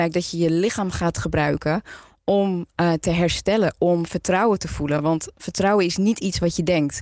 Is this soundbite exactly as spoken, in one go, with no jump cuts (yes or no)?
yes